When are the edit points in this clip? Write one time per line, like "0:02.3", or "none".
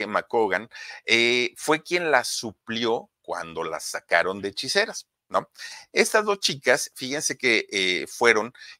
none